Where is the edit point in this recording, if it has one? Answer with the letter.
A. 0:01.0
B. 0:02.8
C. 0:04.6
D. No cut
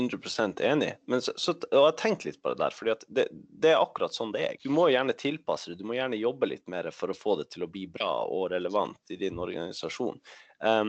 C